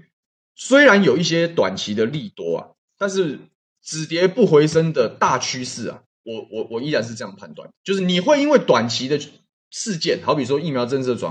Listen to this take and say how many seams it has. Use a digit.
1